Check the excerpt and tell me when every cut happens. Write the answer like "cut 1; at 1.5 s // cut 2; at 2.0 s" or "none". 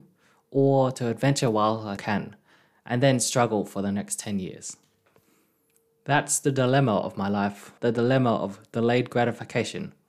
cut 1; at 2.0 s // cut 2; at 7.8 s